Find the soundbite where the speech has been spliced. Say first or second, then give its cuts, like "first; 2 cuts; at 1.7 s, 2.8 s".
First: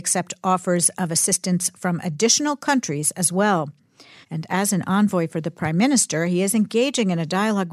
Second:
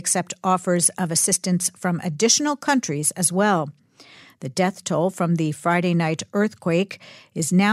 first; 1 cut; at 4.2 s